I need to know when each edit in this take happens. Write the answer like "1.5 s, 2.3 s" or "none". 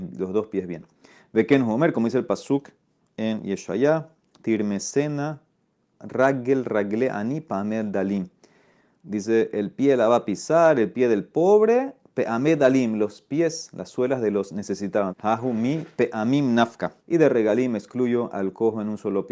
15.1 s, 17.0 s